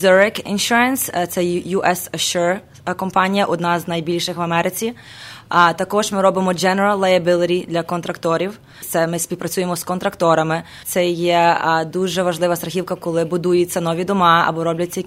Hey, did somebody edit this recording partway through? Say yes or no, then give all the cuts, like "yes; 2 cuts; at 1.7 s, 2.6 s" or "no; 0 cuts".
yes; 2 cuts; at 8.8 s, 10.8 s